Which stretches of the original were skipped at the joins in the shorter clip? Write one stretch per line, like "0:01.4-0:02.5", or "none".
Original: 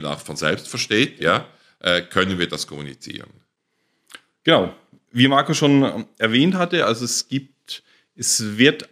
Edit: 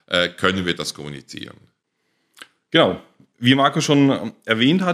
none